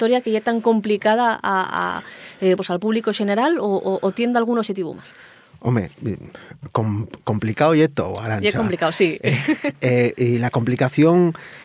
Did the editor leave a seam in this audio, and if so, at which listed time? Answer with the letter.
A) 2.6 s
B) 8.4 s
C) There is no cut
A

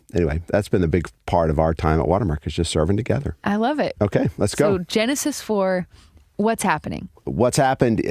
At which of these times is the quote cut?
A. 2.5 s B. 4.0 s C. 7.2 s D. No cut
B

